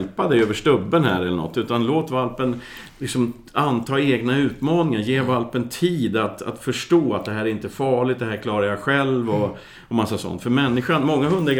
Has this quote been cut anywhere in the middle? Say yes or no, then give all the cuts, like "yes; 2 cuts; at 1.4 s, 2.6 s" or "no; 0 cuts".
no; 0 cuts